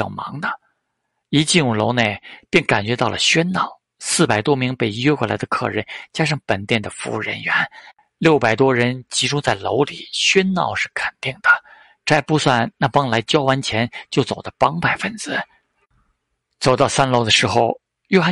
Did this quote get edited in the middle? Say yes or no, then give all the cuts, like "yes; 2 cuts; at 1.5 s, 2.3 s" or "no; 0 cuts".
no; 0 cuts